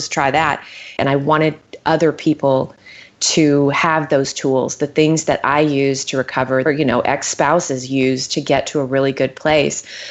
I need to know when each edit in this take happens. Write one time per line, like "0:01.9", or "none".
0:01.0
0:06.6